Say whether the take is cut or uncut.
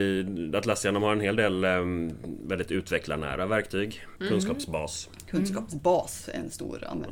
cut